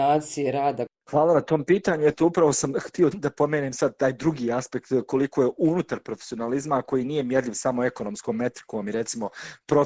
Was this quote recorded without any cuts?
no; 1 cut; at 3.1 s

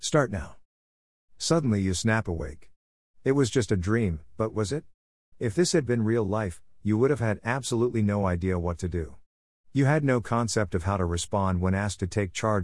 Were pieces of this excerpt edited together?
yes; 1 cut; at 5.3 s

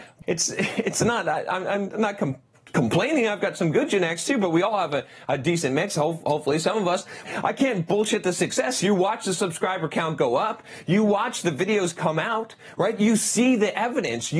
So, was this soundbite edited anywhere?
yes; 1 cut; at 7.3 s

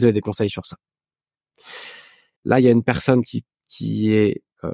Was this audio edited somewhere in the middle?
yes; 1 cut; at 2.4 s

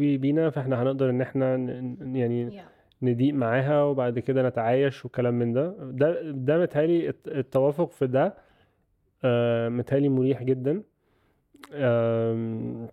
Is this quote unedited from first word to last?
yes; 0 cuts

